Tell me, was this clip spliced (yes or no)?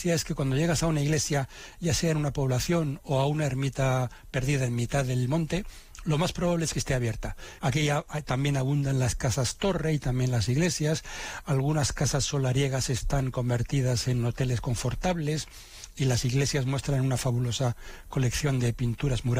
yes